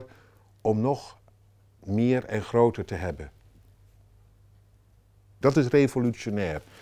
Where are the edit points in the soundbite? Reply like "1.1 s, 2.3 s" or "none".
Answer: 5.4 s